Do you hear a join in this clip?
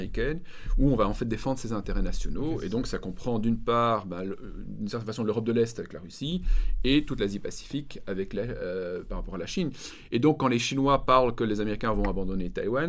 no; 0 cuts

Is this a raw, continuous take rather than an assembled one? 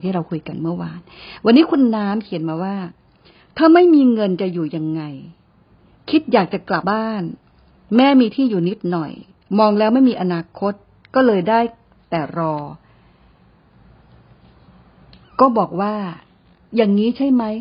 no; 1 cut; at 6.8 s

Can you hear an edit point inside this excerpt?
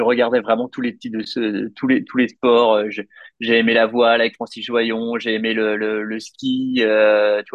no; 0 cuts

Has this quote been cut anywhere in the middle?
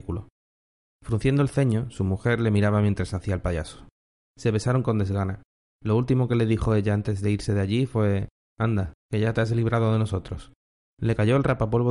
yes; 3 cuts; at 4.3 s, 8.9 s, 10.8 s

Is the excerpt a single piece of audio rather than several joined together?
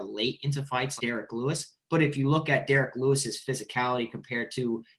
no; 1 cut; at 1.0 s

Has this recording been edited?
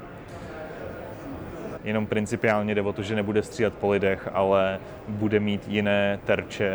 yes; 1 cut; at 1.8 s

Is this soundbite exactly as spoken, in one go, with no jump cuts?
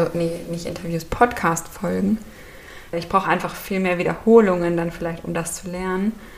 no; 1 cut; at 2.9 s

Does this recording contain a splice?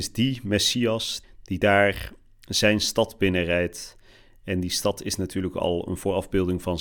yes; 1 cut; at 1.2 s

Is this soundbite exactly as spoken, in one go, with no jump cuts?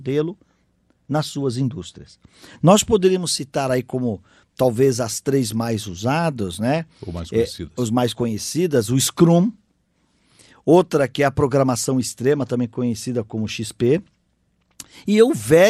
yes; 0 cuts

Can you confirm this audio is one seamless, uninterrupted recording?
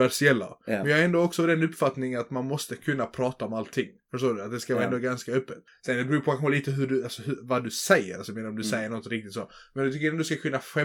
yes; 0 cuts

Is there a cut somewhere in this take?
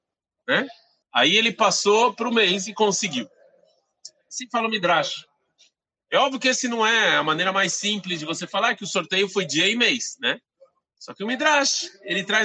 yes; 1 cut; at 1.0 s

